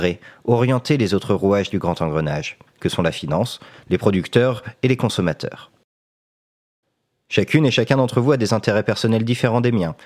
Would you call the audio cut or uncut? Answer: uncut